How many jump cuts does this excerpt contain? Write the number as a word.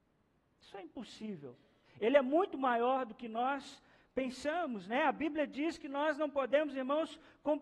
one